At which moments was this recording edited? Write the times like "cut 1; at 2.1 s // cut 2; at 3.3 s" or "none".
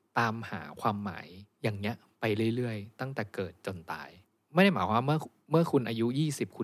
cut 1; at 1.5 s

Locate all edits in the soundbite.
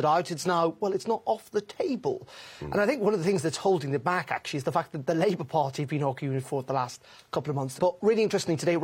cut 1; at 7.8 s

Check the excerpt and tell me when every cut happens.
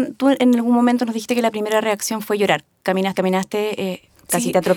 cut 1; at 3.1 s

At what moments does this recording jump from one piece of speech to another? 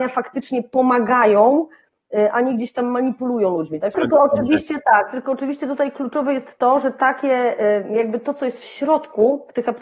cut 1; at 3.9 s

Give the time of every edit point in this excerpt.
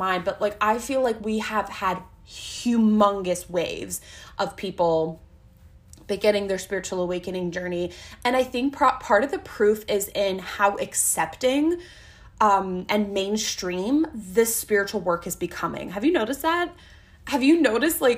none

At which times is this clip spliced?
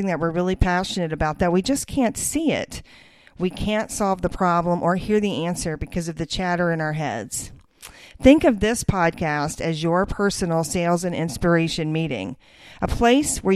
none

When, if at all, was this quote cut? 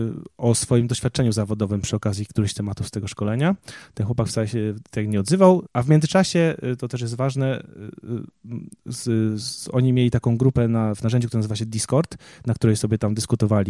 cut 1; at 5.7 s

